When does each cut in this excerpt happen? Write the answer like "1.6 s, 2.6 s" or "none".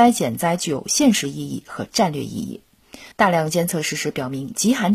3.1 s